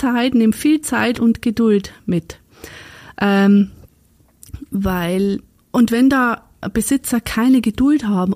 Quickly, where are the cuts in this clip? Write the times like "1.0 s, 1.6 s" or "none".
none